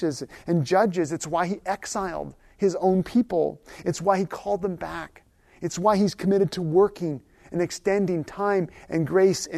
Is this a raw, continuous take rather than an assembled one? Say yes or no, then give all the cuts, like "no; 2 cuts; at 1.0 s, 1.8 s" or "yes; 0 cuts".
yes; 0 cuts